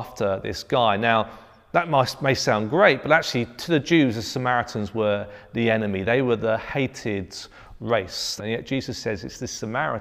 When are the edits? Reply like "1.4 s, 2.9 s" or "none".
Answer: 8.4 s